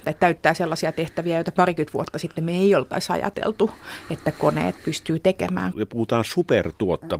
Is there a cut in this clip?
yes; 1 cut; at 5.7 s

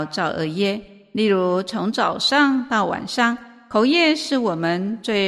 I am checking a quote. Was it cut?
no; 0 cuts

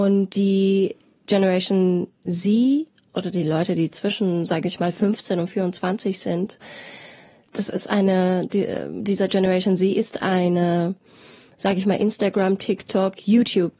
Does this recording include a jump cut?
no; 0 cuts

